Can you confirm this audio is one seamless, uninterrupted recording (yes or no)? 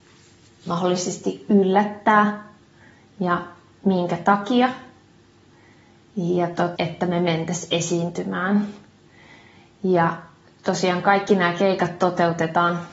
no